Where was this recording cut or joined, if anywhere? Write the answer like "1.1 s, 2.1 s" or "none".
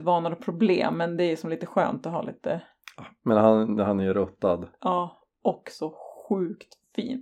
none